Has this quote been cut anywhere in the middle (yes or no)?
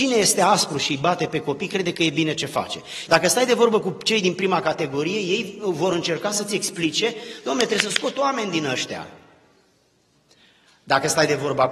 yes